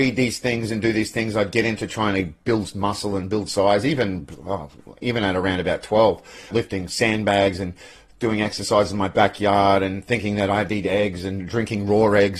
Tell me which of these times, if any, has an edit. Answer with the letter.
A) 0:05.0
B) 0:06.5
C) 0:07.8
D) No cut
B